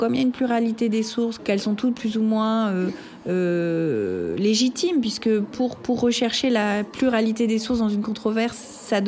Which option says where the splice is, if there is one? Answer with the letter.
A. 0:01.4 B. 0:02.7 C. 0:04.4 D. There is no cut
A